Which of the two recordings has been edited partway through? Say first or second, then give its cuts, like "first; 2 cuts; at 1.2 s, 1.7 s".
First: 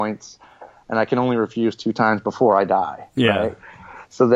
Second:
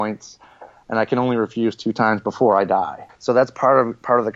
second; 1 cut; at 3.1 s